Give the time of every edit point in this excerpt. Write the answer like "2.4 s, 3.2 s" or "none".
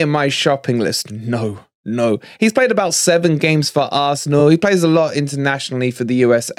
none